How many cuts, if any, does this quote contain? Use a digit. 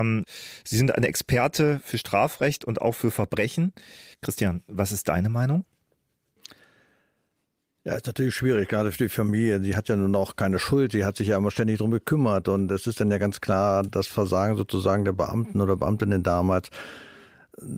1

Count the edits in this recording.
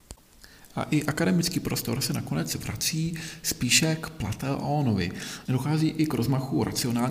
1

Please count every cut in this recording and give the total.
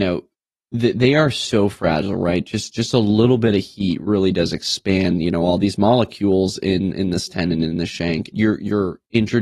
1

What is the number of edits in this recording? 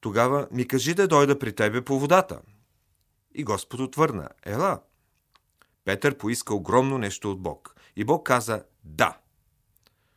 0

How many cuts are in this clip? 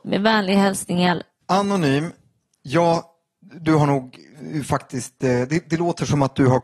1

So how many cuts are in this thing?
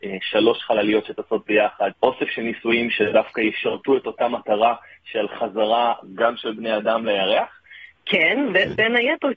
2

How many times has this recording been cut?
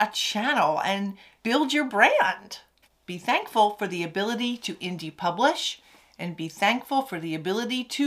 2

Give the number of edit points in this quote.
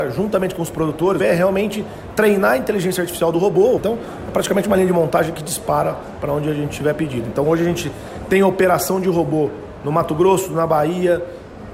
2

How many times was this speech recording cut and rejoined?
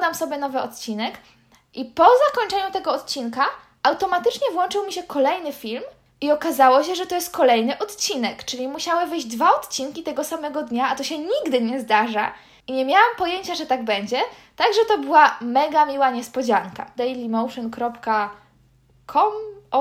1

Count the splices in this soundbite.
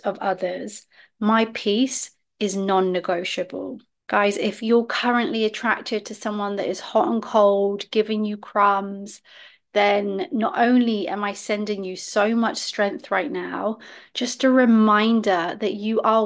0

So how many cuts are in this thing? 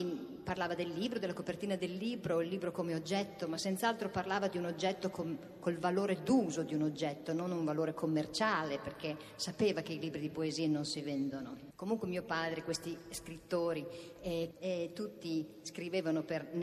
2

